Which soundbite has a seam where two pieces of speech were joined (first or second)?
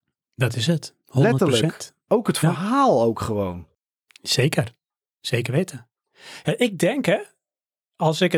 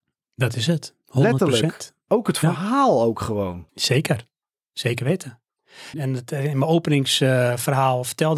second